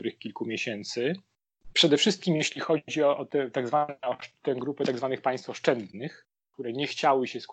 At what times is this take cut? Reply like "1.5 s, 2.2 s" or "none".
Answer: none